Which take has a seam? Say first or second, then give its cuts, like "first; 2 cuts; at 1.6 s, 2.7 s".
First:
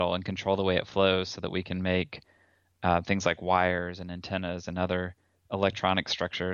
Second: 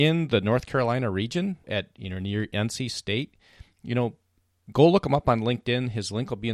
second; 1 cut; at 1.6 s